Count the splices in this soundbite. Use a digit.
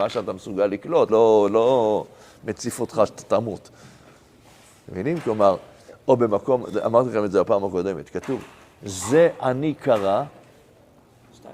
1